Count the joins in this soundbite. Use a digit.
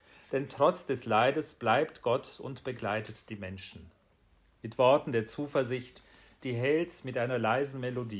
1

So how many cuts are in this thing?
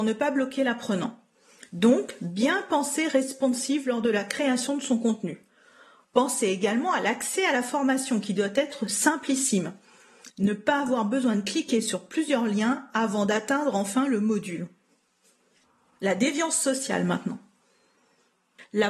0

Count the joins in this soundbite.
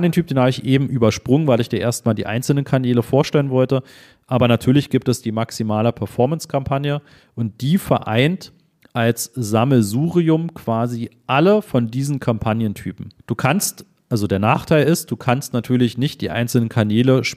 1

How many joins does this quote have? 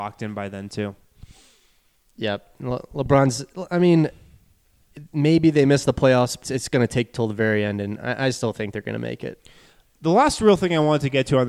1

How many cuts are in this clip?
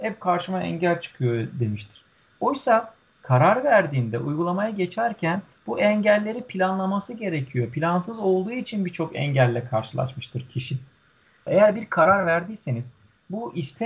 1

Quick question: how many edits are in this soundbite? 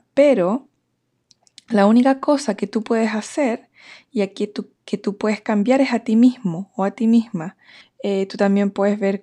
1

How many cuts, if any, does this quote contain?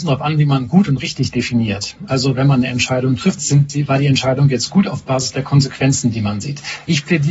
2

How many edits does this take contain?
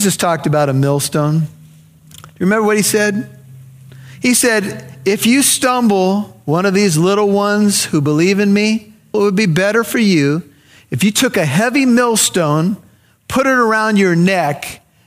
1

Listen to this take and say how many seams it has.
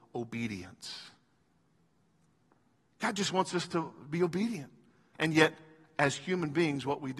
1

